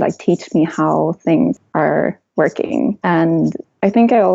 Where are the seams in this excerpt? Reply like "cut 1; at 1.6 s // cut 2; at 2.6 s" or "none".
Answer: none